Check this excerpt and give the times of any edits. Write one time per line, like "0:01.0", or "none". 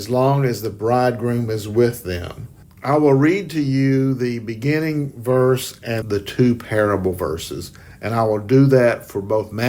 0:02.6
0:06.0